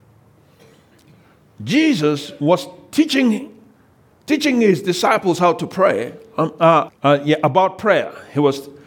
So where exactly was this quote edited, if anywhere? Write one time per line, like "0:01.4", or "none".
0:06.9